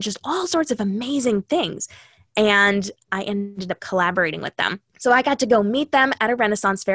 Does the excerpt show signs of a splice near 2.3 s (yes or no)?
no